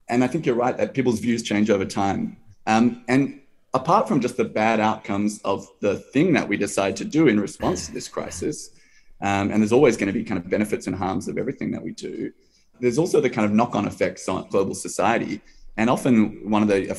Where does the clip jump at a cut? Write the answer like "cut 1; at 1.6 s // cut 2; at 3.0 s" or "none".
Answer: cut 1; at 2.5 s // cut 2; at 12.7 s // cut 3; at 14.5 s